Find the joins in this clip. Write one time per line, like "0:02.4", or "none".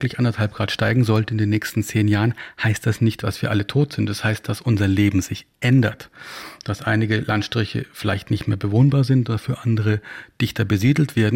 none